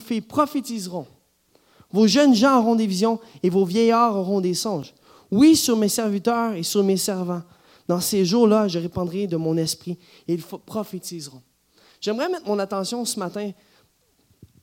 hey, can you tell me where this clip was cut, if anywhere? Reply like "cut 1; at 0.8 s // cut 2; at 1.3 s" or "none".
none